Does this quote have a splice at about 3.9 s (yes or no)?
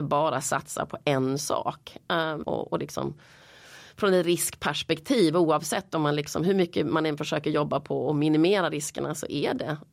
no